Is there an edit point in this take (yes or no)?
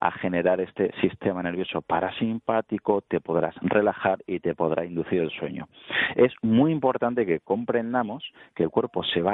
no